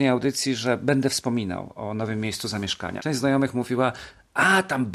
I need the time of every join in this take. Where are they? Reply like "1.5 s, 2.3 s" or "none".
3.0 s